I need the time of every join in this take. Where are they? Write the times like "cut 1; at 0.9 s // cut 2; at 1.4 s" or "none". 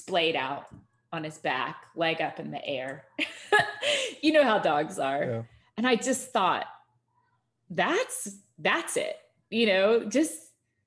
none